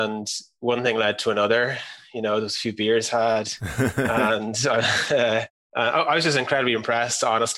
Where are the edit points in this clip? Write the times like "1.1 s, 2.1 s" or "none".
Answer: none